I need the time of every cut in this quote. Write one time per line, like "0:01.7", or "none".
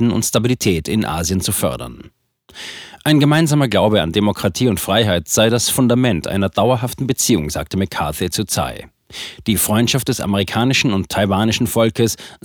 none